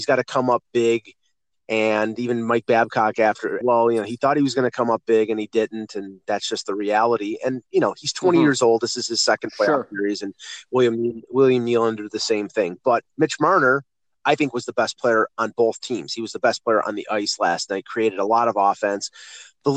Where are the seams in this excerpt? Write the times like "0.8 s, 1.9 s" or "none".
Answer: 3.6 s